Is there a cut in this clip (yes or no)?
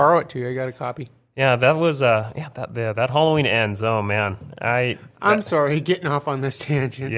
no